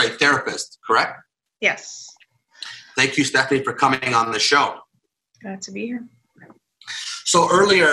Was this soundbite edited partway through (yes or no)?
no